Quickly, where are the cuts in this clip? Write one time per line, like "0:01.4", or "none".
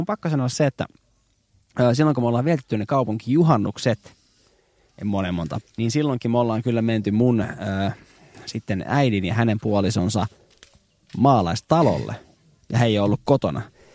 0:05.6